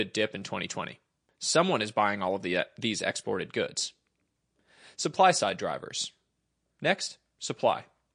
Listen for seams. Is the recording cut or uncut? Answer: uncut